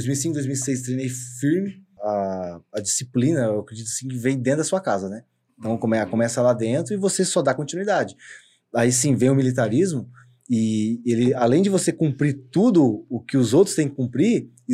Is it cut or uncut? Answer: cut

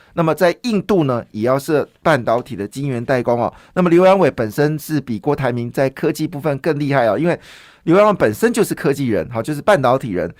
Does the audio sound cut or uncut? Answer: uncut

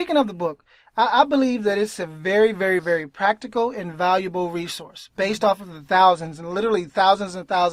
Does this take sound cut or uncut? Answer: cut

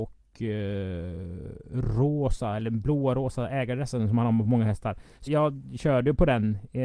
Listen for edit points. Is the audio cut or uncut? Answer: cut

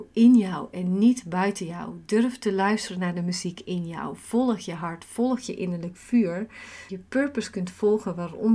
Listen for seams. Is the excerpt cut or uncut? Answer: cut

